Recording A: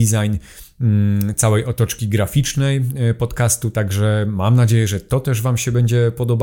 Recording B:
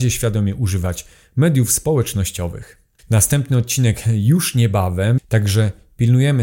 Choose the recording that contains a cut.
B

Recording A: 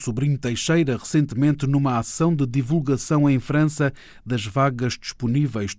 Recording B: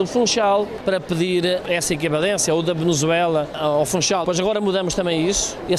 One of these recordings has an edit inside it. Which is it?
B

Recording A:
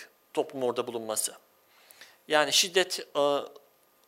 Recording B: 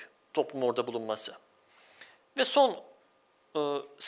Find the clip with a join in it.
B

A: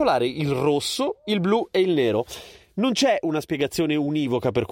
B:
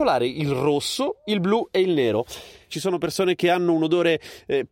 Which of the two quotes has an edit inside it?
B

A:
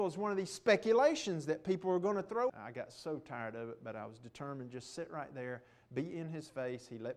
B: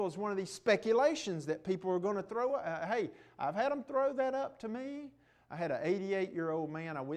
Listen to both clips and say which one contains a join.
A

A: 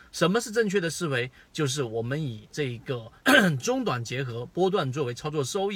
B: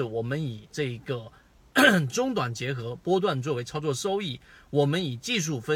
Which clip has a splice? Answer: A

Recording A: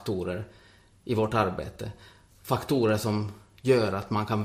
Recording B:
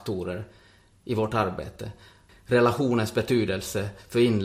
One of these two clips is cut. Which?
B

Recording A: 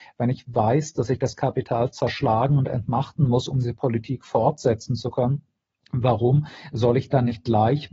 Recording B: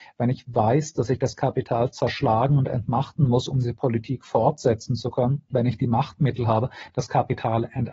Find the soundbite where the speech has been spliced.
B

